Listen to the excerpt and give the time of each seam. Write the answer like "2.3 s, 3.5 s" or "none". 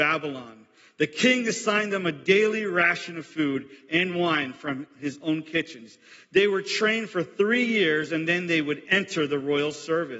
none